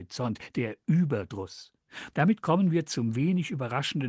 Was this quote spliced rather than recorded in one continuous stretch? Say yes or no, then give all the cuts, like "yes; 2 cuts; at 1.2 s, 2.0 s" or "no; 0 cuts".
yes; 1 cut; at 2.1 s